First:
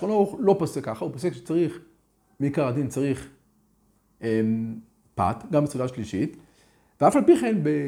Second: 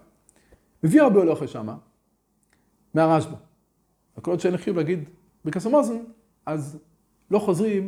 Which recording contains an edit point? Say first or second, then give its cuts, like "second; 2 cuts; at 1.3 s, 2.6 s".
second; 1 cut; at 4.0 s